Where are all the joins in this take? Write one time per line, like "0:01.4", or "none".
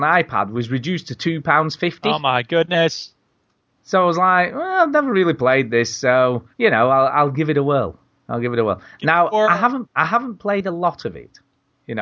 0:06.5
0:09.9